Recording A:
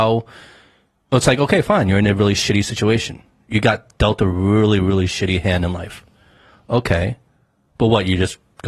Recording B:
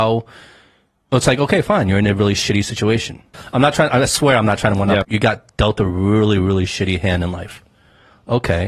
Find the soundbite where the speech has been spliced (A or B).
B